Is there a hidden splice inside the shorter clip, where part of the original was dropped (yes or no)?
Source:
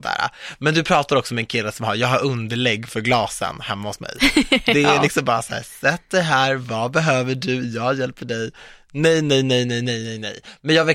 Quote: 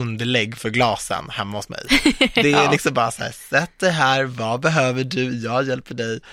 no